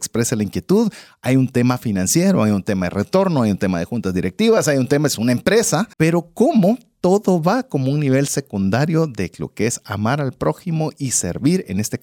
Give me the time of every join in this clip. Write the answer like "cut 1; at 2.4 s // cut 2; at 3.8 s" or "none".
cut 1; at 5.9 s